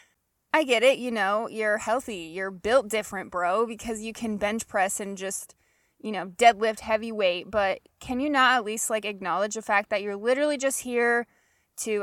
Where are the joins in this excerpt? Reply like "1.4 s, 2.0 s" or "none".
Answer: none